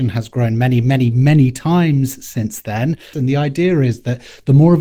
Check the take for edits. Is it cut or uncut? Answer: cut